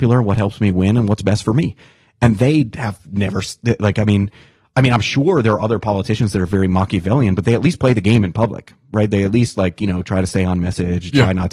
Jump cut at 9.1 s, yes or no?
no